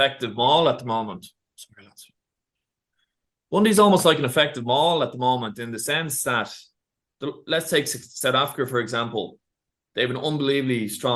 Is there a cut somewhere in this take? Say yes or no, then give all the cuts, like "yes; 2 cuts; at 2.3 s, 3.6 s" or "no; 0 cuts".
no; 0 cuts